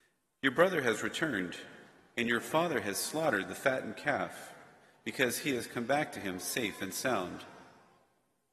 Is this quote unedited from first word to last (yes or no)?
yes